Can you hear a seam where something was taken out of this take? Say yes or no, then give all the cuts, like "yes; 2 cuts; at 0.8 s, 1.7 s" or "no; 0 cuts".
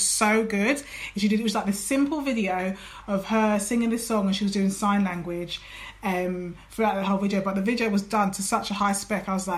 no; 0 cuts